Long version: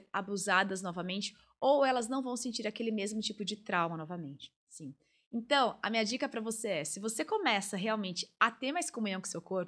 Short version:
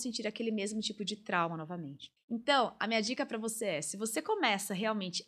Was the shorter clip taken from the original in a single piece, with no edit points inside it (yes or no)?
no